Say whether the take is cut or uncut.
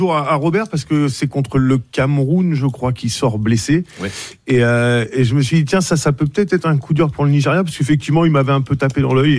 uncut